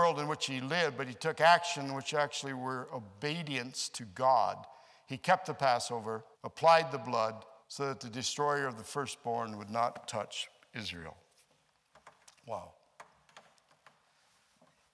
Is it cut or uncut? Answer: cut